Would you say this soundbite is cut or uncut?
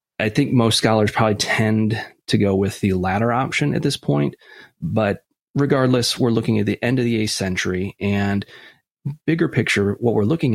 uncut